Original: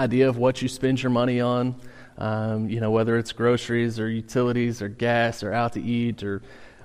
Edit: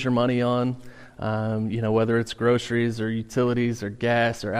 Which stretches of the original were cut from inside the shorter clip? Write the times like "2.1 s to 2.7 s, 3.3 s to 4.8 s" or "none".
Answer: none